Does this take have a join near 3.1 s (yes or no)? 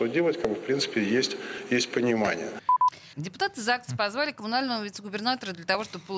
yes